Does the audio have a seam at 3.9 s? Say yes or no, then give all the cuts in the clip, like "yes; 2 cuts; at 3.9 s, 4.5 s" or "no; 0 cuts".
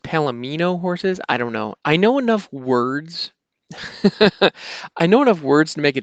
no; 1 cut; at 1.7 s